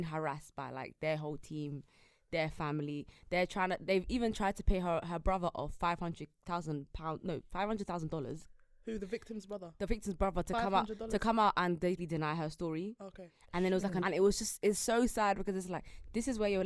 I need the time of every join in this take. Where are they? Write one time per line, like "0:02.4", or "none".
0:12.0
0:14.0